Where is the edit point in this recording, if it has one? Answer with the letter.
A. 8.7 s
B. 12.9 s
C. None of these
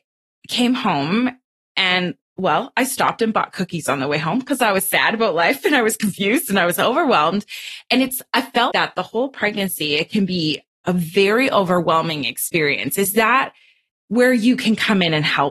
A